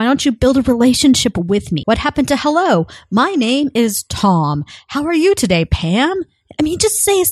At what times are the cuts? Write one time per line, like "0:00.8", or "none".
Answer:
0:01.8